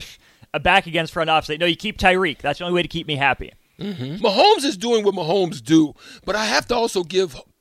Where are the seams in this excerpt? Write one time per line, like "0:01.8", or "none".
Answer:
0:04.2